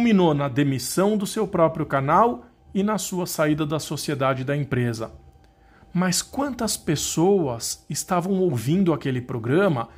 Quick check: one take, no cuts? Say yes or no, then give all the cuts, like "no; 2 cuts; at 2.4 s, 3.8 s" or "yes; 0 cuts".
yes; 0 cuts